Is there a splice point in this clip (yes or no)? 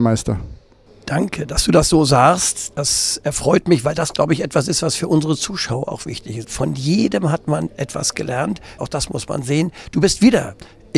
yes